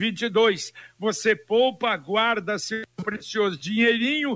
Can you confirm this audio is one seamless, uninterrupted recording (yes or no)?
yes